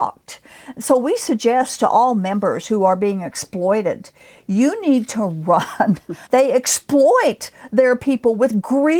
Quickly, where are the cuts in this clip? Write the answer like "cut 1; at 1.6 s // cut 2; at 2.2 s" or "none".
cut 1; at 6.3 s